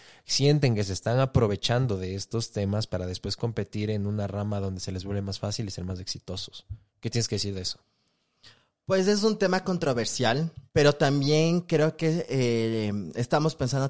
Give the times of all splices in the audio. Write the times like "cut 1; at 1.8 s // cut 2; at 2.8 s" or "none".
cut 1; at 10.7 s

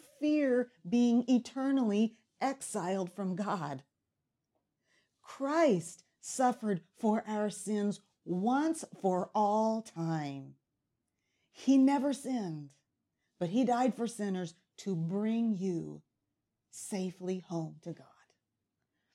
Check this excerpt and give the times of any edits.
none

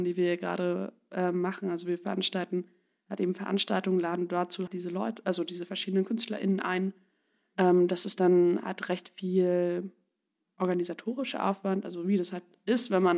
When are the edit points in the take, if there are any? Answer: cut 1; at 4.7 s

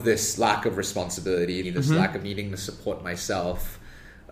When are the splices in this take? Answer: cut 1; at 1.6 s

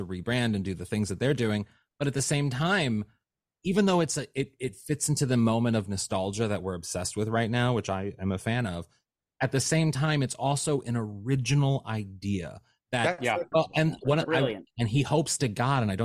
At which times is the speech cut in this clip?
cut 1; at 13.5 s // cut 2; at 14.7 s

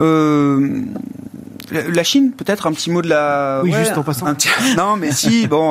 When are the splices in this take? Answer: none

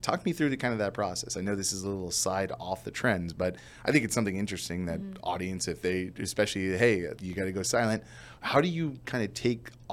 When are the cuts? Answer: cut 1; at 7.2 s

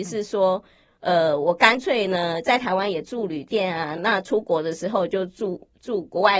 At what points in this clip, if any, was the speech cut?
none

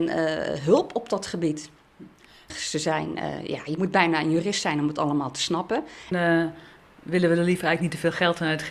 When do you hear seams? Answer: cut 1; at 2.5 s // cut 2; at 6.1 s

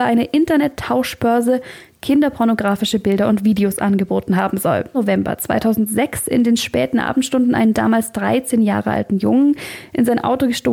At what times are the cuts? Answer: cut 1; at 4.9 s

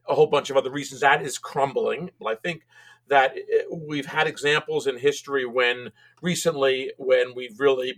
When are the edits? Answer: cut 1; at 1.0 s // cut 2; at 2.2 s

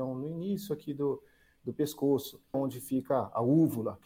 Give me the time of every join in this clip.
cut 1; at 2.5 s

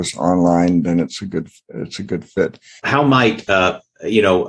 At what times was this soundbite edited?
cut 1; at 2.8 s

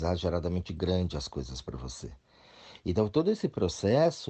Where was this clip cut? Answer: none

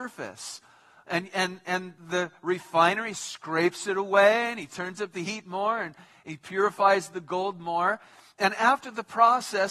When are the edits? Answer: none

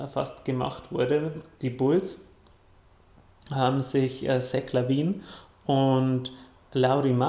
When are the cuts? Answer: none

